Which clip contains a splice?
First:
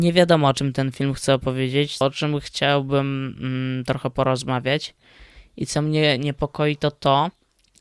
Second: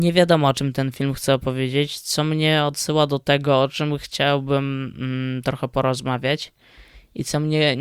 first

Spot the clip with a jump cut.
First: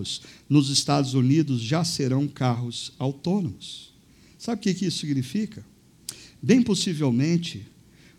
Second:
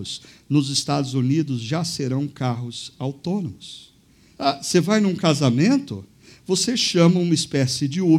second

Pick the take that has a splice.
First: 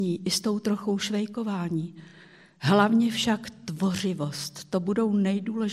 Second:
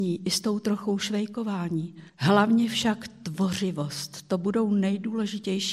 second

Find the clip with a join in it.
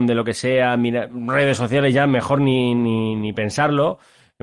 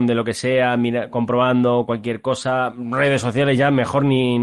first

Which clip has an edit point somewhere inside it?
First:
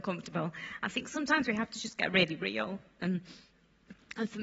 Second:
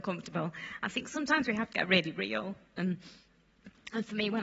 second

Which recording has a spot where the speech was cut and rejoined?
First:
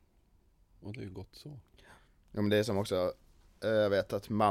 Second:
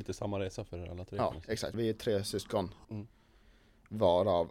second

